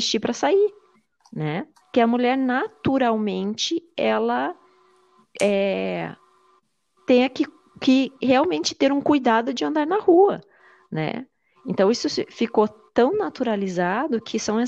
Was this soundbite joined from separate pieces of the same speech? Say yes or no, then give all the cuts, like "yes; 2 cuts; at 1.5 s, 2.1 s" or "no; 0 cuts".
yes; 2 cuts; at 1.8 s, 8.2 s